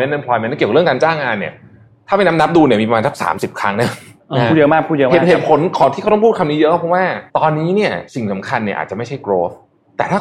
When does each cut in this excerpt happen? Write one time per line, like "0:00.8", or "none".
0:07.3